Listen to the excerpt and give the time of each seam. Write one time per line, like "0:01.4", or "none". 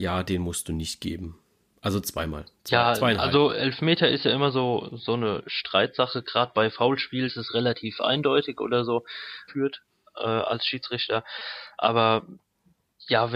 0:07.3
0:09.5